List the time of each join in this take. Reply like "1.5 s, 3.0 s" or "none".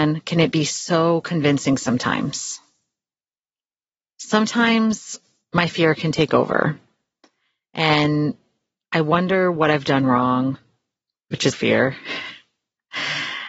11.5 s